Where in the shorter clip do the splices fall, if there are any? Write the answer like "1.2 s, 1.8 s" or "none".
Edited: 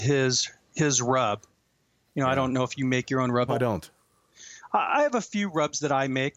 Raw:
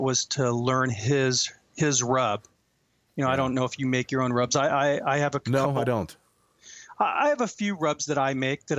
3.5 s